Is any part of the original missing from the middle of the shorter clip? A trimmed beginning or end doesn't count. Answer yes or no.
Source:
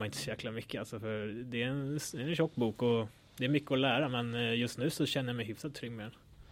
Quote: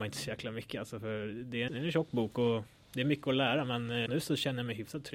yes